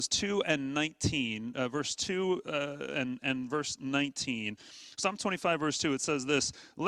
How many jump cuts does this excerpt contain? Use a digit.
0